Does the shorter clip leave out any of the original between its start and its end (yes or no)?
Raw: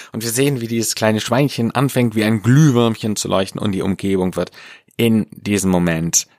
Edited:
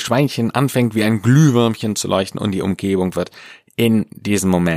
no